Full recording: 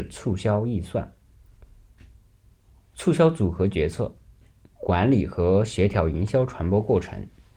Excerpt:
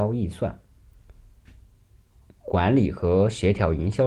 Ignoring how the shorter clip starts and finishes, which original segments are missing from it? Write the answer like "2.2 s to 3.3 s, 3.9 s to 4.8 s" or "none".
2.8 s to 4.6 s